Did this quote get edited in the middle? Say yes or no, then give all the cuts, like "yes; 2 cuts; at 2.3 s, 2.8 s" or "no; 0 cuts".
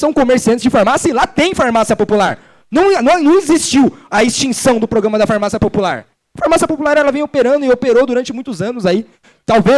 yes; 1 cut; at 6.2 s